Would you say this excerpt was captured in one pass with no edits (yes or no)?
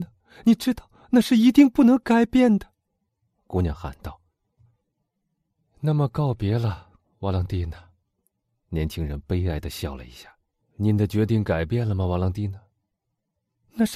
no